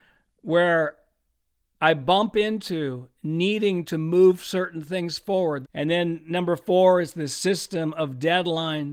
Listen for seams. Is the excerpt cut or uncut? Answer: cut